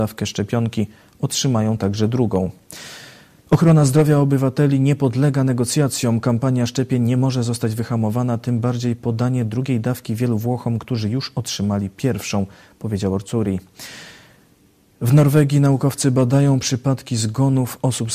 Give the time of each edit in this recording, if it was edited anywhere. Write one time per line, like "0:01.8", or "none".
none